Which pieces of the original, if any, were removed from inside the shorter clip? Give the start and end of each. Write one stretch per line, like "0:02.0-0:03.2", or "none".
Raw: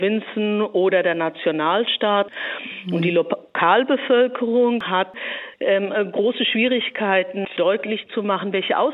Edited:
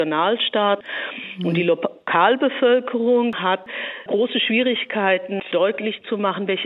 0:05.5-0:06.1